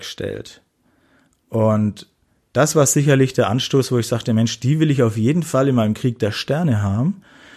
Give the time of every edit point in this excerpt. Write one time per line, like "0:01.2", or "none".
none